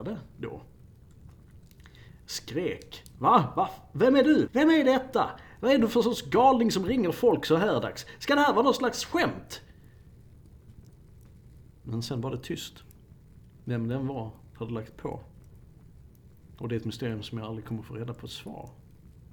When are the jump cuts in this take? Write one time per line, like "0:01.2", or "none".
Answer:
0:04.5